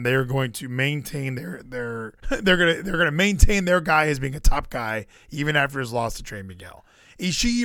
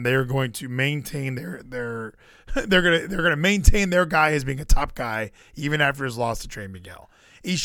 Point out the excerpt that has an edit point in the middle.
first; 1 cut; at 2.2 s

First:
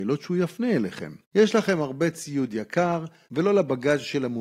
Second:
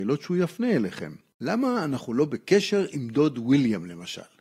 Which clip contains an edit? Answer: first; 2 cuts; at 1.2 s, 3.3 s

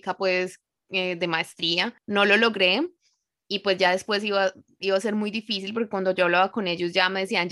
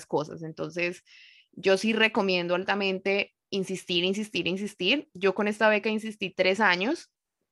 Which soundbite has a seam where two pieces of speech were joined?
first; 1 cut; at 2.0 s

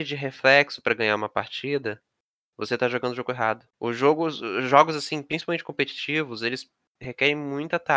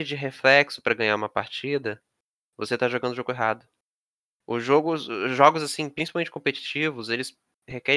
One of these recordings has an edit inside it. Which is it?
first; 1 cut; at 3.7 s

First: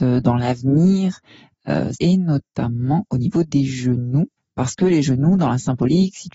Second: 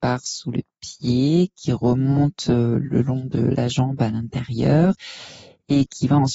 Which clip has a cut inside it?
first; 1 cut; at 1.9 s

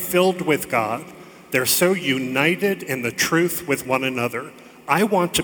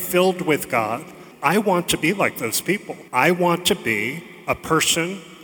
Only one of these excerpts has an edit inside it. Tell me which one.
second; 2 cuts; at 1.3 s, 3.1 s

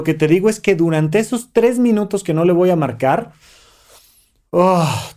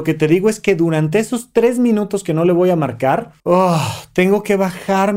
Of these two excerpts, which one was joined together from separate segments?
second; 1 cut; at 3.4 s

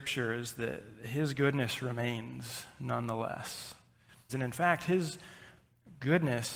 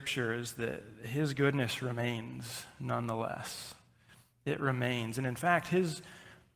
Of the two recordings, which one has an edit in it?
first; 1 cut; at 4.3 s

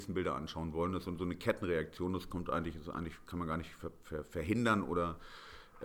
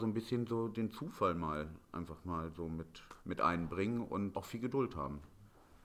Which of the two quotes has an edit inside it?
second; 2 cuts; at 3.2 s, 4.3 s

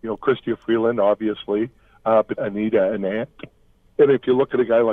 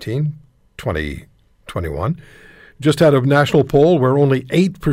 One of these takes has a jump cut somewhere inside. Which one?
first; 1 cut; at 2.3 s

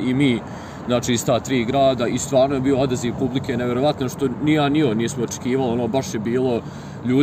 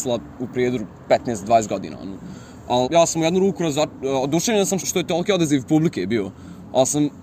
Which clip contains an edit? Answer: second; 2 cuts; at 2.8 s, 4.8 s

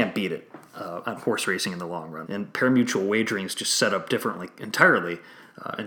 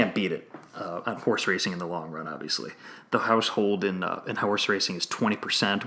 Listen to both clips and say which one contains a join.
first; 1 cut; at 2.2 s

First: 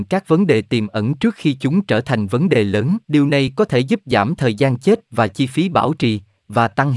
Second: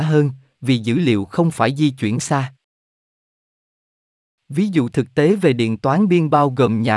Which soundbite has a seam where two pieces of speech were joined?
first; 1 cut; at 3.0 s

